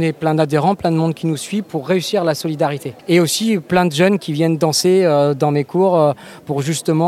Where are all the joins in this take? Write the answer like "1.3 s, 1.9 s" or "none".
1.6 s, 3.0 s